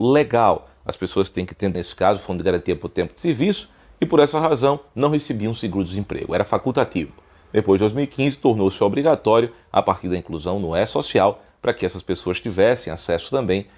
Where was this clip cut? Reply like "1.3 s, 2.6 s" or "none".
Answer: 1.7 s